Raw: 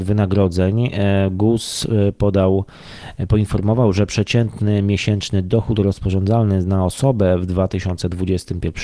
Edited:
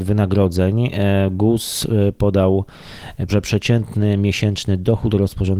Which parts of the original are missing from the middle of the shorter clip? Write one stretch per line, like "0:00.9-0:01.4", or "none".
0:03.3-0:03.9